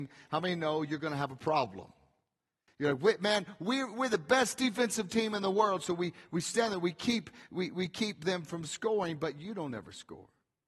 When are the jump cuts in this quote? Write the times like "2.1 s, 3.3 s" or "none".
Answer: none